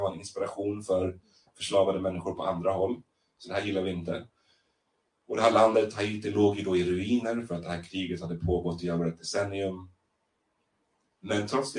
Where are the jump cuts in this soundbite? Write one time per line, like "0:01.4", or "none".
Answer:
none